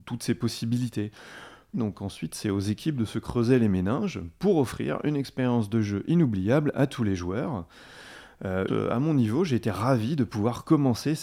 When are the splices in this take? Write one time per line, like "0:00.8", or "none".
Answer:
0:01.7
0:08.7